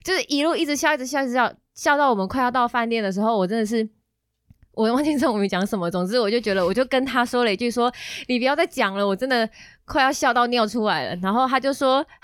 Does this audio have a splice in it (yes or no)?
no